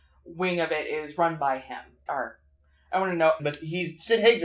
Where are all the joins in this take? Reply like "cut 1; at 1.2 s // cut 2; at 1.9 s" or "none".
cut 1; at 2.1 s // cut 2; at 3.4 s